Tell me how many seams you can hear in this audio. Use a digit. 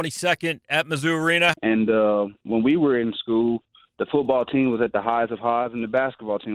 1